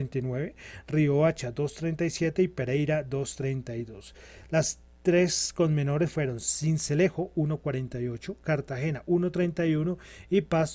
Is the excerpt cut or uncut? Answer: uncut